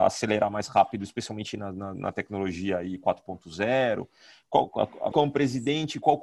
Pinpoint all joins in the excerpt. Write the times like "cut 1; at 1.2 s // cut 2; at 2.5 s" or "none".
cut 1; at 5.1 s